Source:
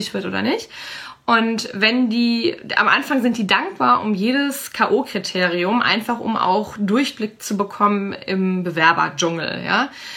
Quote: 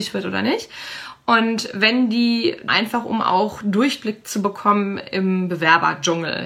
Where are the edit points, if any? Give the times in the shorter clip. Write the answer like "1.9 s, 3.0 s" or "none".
2.7 s